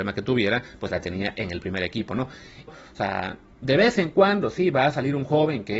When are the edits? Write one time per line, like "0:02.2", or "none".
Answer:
0:02.7